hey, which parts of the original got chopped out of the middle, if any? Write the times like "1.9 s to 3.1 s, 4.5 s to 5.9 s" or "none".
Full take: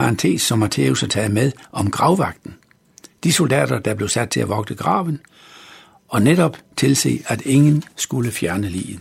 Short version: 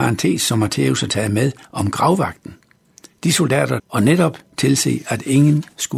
3.8 s to 6.0 s